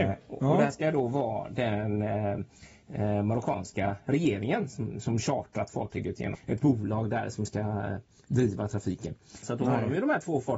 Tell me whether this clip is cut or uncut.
cut